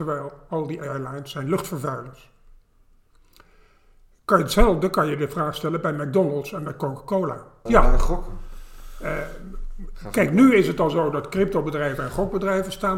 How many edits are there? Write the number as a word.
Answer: one